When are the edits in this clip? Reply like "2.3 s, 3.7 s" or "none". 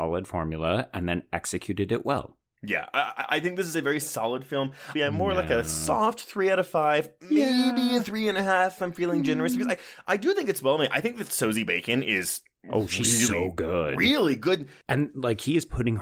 5.0 s